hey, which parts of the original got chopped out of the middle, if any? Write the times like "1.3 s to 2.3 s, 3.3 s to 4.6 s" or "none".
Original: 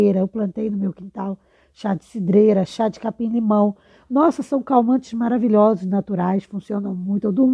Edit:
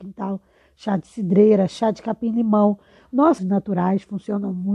4.4 s to 5.8 s